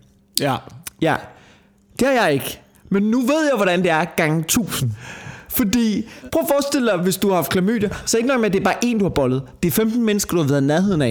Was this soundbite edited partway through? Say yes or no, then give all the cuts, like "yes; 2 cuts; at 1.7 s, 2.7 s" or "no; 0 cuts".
no; 0 cuts